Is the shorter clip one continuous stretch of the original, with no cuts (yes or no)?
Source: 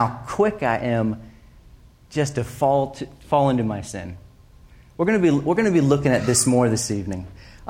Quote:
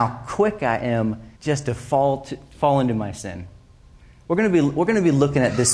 no